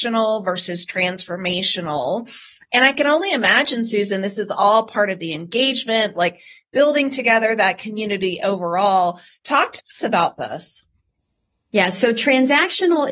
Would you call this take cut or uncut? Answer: cut